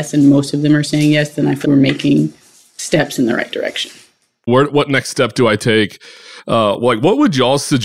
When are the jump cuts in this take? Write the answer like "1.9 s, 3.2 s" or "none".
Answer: 1.6 s, 4.5 s